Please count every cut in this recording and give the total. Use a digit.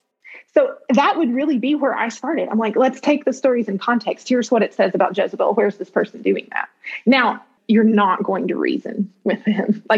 1